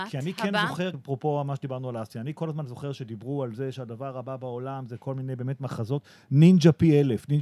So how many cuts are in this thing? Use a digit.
1